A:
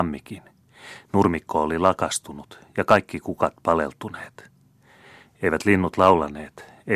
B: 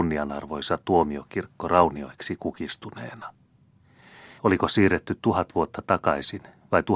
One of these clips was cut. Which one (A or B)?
B